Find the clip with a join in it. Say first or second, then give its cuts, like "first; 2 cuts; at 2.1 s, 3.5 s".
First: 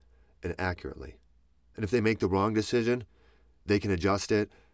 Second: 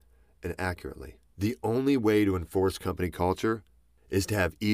second; 1 cut; at 1.3 s